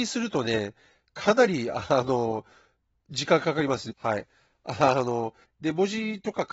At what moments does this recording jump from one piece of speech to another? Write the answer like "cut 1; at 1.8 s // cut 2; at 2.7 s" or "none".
cut 1; at 3.9 s // cut 2; at 5.4 s